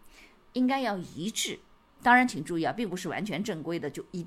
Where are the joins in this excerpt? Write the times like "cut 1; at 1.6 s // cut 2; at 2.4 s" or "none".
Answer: cut 1; at 2.0 s